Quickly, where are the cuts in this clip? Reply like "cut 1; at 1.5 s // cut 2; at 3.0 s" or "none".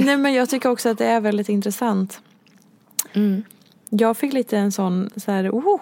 cut 1; at 3.1 s